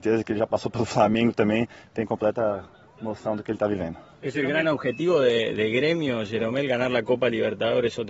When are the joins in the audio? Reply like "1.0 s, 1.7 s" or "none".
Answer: none